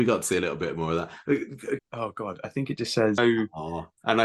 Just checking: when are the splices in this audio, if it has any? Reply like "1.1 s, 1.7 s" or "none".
1.8 s, 3.2 s